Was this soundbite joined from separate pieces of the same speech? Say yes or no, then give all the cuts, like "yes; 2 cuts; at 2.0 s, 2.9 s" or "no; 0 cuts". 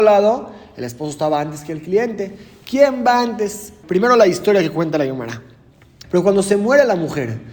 yes; 2 cuts; at 3.8 s, 6.0 s